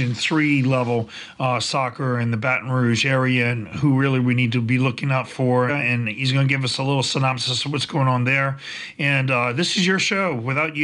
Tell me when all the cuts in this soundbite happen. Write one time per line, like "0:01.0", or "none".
0:05.7
0:08.9

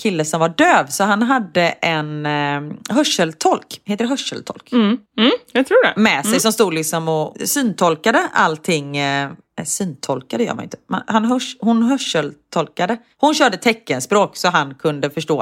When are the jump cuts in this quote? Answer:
0:05.1

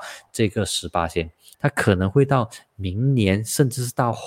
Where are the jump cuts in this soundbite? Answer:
0:01.5

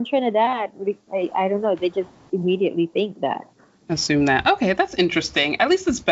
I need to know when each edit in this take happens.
none

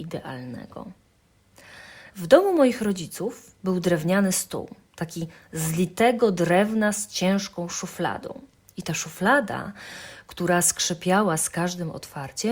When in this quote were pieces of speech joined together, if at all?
0:02.1

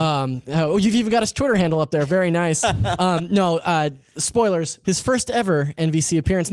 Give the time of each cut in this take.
0:04.8

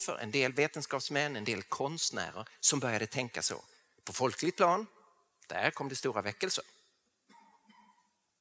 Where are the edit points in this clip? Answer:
none

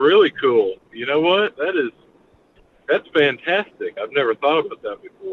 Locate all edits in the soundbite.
0:04.0

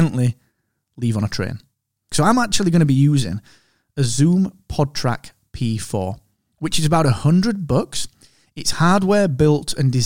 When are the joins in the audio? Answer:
0:02.1

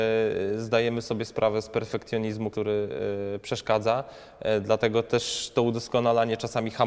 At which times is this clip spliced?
0:02.5

